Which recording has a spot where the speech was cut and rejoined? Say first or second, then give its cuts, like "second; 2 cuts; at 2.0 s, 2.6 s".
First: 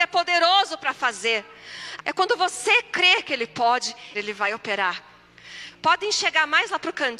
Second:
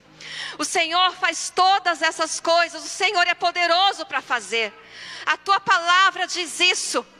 first; 3 cuts; at 2.0 s, 4.1 s, 5.7 s